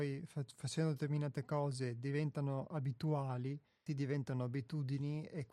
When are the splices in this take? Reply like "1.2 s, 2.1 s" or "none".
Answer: 3.9 s